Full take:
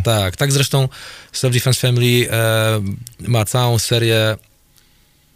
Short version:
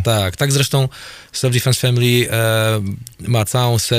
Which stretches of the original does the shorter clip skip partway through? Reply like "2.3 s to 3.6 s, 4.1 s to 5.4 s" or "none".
none